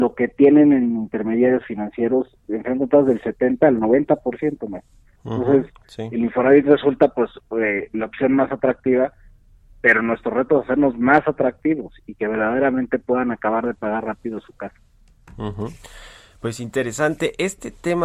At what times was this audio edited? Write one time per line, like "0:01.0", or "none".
none